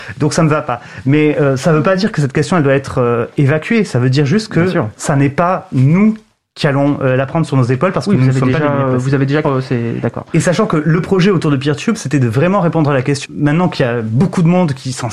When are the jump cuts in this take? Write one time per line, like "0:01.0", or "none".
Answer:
0:09.4
0:13.3